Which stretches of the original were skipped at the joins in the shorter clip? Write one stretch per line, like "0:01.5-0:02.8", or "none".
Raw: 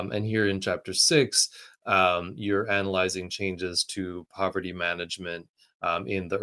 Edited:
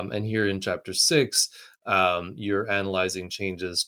none